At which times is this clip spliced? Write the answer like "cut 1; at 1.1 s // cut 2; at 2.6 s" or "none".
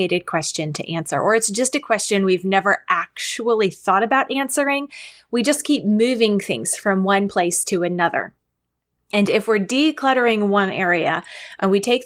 none